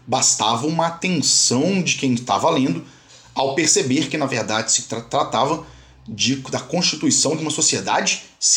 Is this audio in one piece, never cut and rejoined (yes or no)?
yes